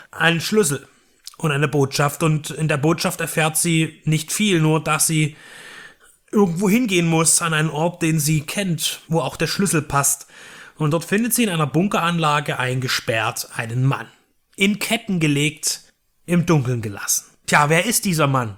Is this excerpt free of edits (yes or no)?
no